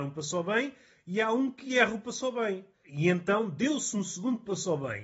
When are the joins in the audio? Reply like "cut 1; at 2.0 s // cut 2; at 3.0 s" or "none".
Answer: cut 1; at 2.7 s